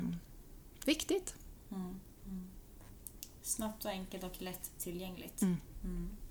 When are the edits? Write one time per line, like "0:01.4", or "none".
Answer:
0:02.2